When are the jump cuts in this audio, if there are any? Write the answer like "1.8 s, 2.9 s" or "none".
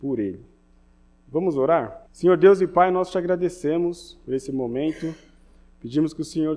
2.1 s